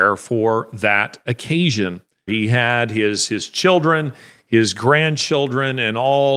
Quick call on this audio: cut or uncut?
cut